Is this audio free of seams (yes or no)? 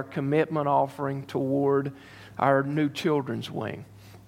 yes